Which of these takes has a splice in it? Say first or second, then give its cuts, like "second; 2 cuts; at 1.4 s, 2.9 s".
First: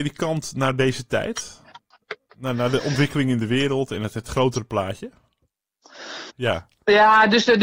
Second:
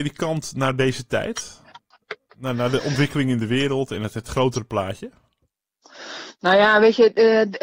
first; 1 cut; at 6.3 s